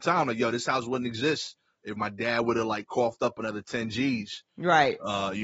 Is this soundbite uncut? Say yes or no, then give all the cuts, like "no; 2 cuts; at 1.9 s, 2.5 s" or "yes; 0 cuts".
yes; 0 cuts